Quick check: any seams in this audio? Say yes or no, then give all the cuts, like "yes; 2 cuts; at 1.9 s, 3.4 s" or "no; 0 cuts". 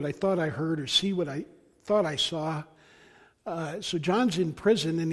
no; 0 cuts